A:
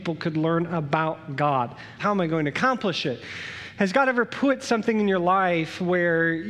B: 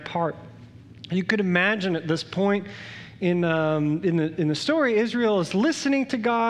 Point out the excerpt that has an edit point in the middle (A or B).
A